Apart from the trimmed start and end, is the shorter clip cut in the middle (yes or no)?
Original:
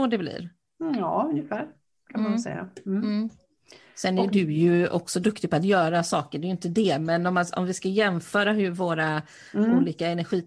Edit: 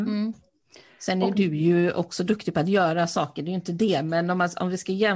no